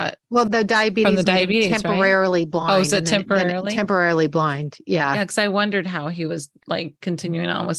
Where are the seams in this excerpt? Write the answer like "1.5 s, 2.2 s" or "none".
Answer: none